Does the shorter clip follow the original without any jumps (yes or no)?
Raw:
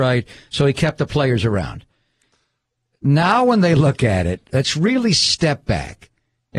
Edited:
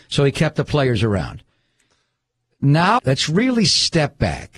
no